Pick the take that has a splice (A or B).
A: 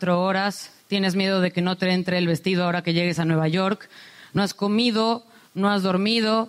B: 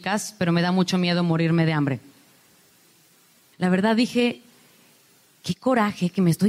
B